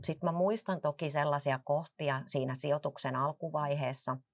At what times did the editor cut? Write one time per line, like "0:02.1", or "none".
none